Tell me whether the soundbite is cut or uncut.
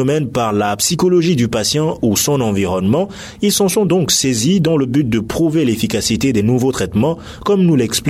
uncut